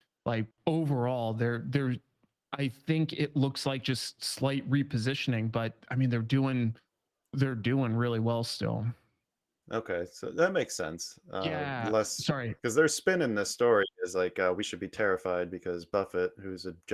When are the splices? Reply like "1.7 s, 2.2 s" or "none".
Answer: none